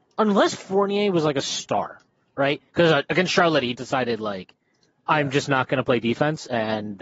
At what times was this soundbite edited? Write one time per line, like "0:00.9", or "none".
0:02.7
0:03.7

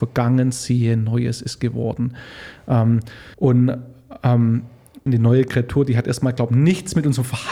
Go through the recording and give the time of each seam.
0:03.3
0:05.1

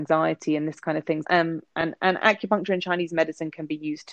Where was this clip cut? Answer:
0:01.2

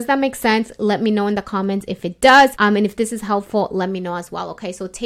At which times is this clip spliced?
none

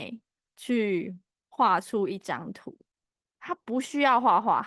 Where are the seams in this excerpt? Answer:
none

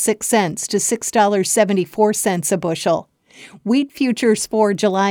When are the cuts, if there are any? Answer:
none

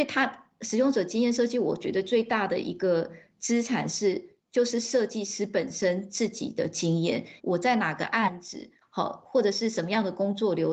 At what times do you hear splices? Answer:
0:07.4
0:08.8

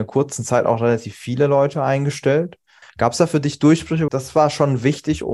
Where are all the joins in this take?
0:02.8
0:04.1

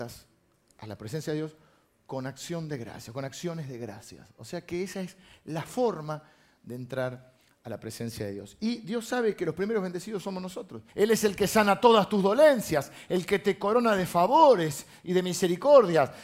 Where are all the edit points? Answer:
0:10.9
0:13.1

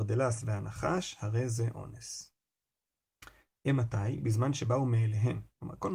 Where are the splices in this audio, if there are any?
none

